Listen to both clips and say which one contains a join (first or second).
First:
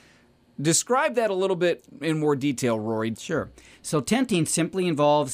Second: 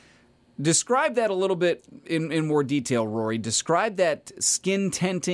first